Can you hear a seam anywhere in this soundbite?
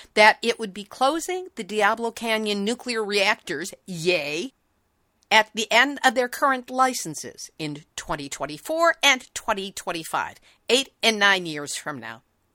no; 0 cuts

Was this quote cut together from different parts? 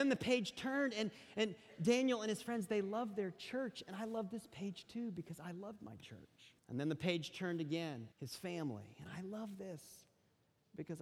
yes; 2 cuts; at 6.6 s, 8.1 s

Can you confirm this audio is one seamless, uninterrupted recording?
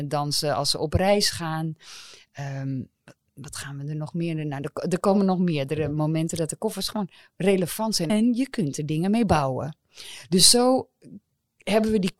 no; 1 cut; at 8.1 s

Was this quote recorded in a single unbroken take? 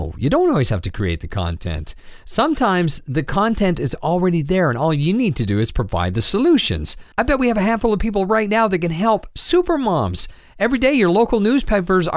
yes; 0 cuts

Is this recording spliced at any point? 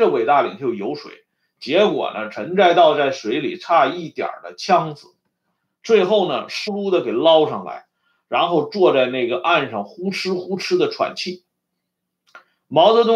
yes; 1 cut; at 6.7 s

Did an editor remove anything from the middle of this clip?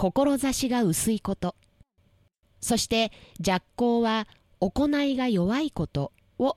no; 0 cuts

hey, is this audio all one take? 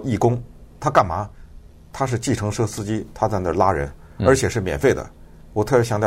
yes; 0 cuts

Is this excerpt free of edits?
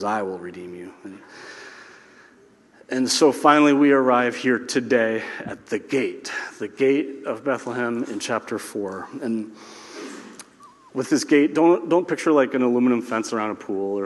yes; 0 cuts

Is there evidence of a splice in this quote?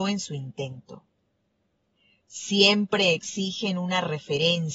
yes; 1 cut; at 2.2 s

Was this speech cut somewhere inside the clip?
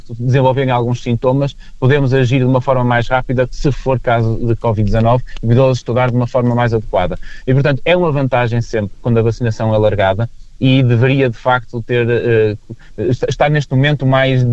no; 0 cuts

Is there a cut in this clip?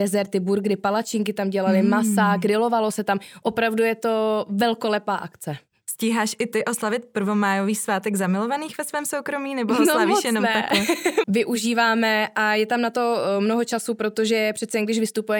yes; 1 cut; at 11.2 s

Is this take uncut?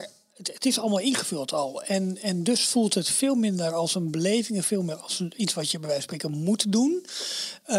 yes; 0 cuts

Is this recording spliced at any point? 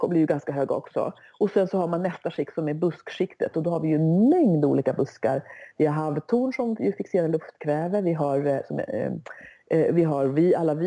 no; 0 cuts

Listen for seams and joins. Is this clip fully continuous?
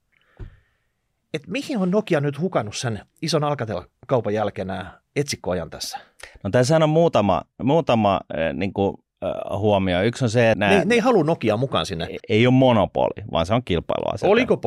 no; 2 cuts; at 10.5 s, 12.2 s

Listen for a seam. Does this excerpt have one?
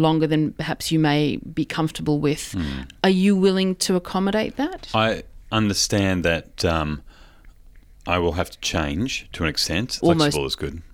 yes; 1 cut; at 10.0 s

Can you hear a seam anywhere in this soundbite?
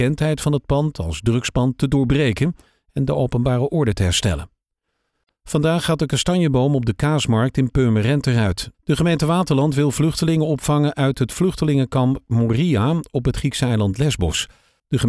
yes; 1 cut; at 8.7 s

